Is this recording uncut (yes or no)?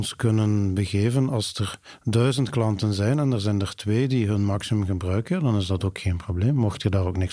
yes